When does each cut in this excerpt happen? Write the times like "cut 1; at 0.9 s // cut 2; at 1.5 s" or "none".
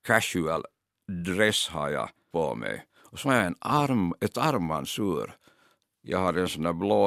cut 1; at 2.3 s // cut 2; at 5.8 s